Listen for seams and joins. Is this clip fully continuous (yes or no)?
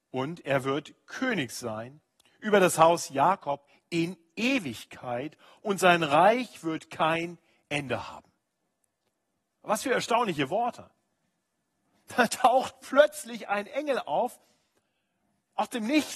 yes